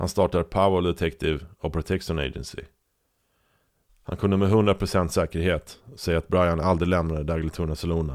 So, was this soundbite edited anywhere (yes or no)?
yes